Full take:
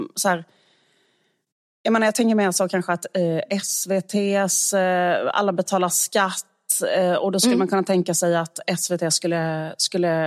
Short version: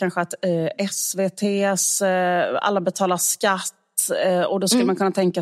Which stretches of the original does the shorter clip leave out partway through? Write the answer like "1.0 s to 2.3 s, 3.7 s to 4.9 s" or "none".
none